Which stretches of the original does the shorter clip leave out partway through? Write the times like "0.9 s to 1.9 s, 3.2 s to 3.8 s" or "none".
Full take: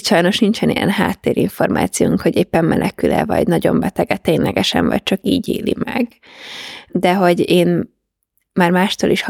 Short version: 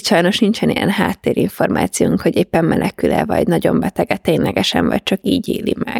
none